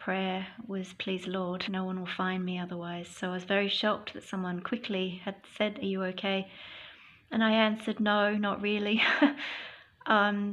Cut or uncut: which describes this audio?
cut